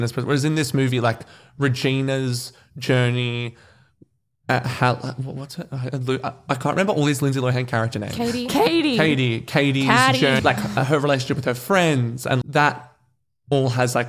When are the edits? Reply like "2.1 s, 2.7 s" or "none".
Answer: 10.4 s, 12.4 s